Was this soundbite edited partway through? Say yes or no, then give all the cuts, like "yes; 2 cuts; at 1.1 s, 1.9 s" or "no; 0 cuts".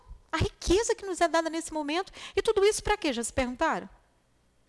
no; 0 cuts